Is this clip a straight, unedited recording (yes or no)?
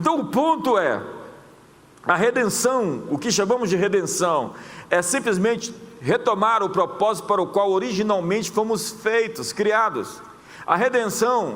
yes